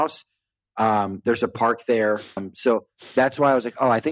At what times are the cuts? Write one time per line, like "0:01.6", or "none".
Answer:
0:02.4